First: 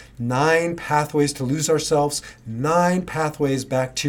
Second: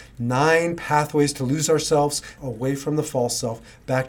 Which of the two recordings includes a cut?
second; 1 cut; at 2.4 s

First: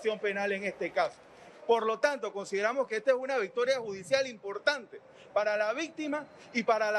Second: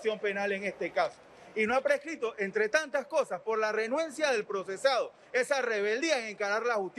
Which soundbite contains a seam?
first; 1 cut; at 1.5 s

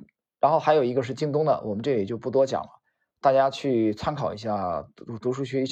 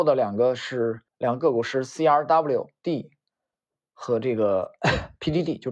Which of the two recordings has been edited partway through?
second; 1 cut; at 1.1 s

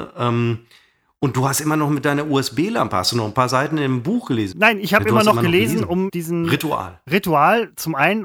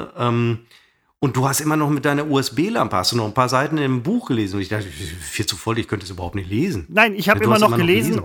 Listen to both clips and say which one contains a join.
first; 2 cuts; at 4.5 s, 6.1 s

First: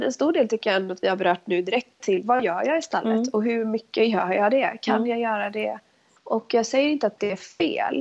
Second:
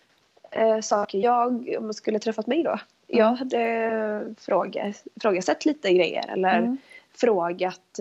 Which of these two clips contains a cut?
first; 2 cuts; at 2.0 s, 6.2 s

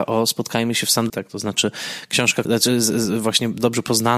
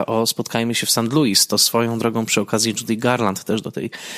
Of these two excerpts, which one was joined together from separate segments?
first; 2 cuts; at 1.1 s, 2.5 s

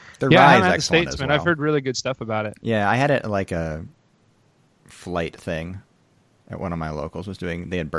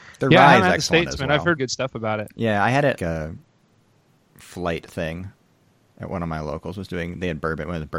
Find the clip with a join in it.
second; 2 cuts; at 1.6 s, 3.0 s

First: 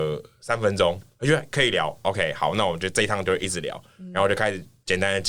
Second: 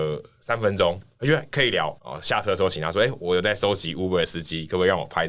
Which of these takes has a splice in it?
second; 1 cut; at 2.0 s

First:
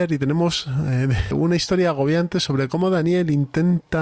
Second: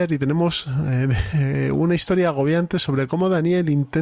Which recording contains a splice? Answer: first; 1 cut; at 1.3 s

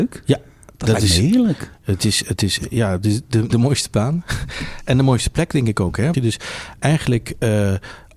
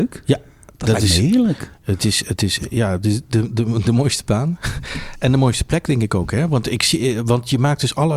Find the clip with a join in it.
first; 2 cuts; at 3.5 s, 6.1 s

